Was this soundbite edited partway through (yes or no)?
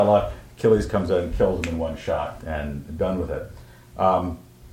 yes